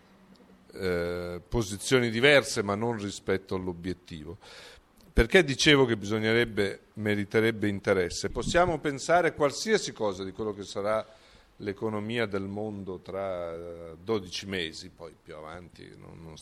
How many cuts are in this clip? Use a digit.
1